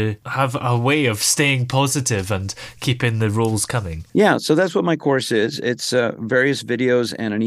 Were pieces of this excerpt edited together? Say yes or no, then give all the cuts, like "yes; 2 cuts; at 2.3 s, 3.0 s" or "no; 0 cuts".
no; 0 cuts